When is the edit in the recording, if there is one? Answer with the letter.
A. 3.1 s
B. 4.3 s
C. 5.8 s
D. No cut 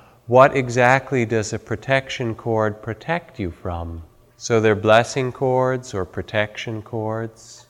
B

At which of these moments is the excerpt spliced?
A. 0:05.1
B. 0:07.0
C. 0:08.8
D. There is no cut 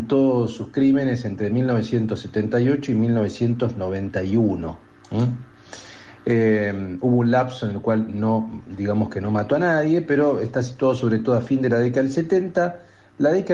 D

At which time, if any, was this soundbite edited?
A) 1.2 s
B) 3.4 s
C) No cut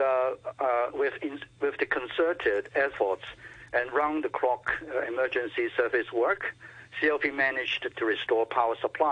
C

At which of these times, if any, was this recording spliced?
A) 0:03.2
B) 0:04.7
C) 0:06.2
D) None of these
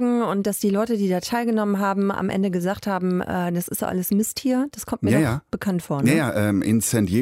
D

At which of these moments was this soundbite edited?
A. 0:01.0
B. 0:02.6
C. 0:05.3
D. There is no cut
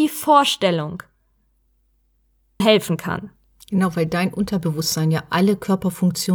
B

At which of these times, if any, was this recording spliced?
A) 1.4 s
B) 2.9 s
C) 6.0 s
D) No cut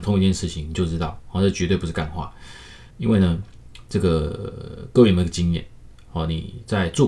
B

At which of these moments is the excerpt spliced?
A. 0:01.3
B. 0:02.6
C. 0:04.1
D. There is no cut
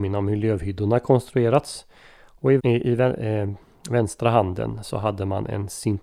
B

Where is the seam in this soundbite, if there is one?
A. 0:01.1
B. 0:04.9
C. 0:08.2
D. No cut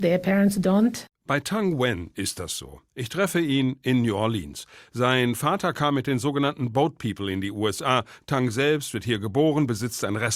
D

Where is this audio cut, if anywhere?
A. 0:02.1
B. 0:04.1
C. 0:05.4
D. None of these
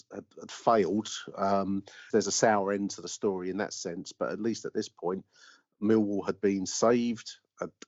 A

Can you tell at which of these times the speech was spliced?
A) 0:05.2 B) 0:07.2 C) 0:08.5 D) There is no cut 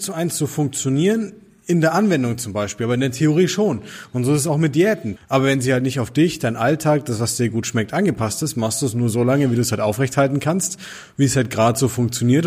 A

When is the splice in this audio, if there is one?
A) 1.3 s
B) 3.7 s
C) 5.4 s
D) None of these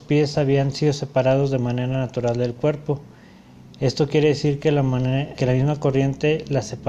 C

